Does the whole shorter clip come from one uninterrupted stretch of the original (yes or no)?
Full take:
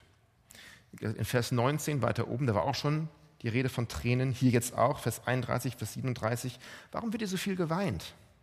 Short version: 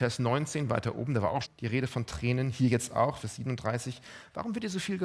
no